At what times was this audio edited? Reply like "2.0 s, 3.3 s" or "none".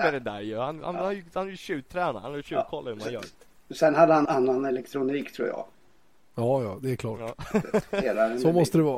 4.3 s